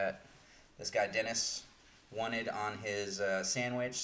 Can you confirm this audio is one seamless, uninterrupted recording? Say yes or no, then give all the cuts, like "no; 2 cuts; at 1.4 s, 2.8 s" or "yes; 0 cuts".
yes; 0 cuts